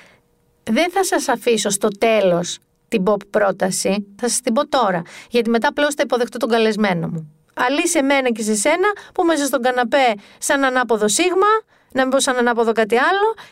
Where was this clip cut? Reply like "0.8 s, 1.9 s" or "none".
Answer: 4.2 s, 7.4 s